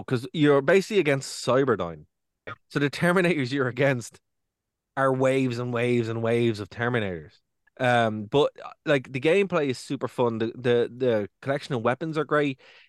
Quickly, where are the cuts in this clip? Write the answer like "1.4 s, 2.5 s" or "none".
2.5 s, 7.7 s

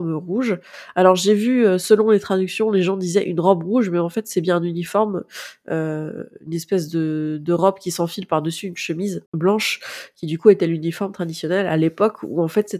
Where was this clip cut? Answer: 9.3 s

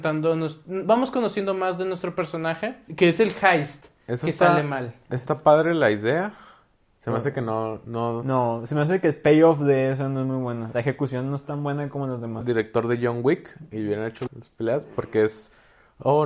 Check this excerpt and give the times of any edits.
2.9 s, 12.4 s, 14.3 s

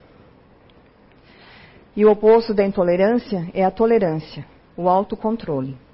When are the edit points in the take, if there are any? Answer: 4.6 s

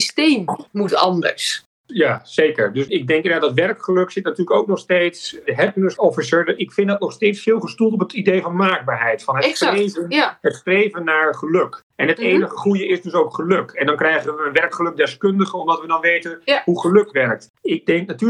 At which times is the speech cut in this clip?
none

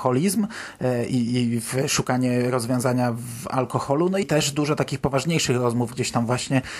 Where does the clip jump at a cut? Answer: 4.2 s

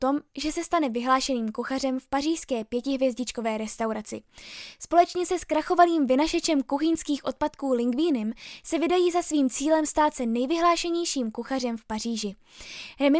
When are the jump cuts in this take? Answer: none

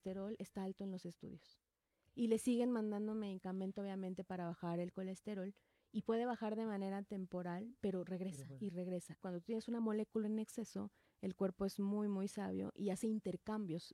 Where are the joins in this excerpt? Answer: 9.2 s

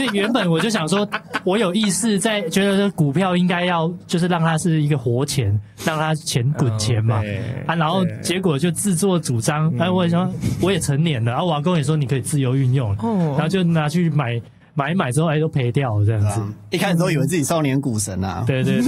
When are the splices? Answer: none

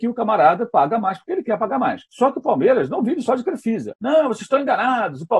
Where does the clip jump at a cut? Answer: 2.1 s, 3.9 s

